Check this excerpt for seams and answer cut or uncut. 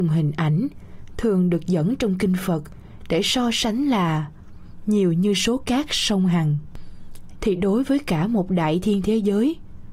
cut